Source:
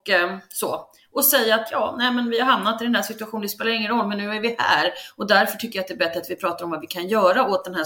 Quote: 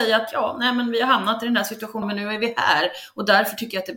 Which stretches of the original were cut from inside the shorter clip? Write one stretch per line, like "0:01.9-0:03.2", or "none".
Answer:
0:03.4-0:04.0